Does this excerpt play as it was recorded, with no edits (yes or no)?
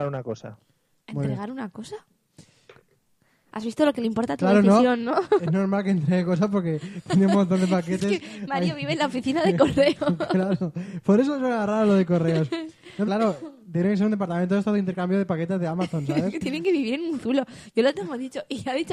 no